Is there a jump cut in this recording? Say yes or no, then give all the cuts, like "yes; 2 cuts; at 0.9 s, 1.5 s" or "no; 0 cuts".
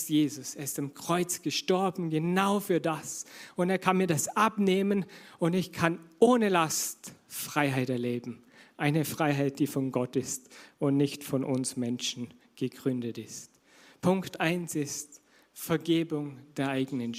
no; 0 cuts